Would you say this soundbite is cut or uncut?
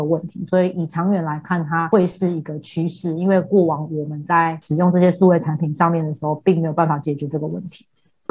uncut